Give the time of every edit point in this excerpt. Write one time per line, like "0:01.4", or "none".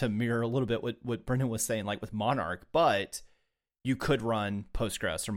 none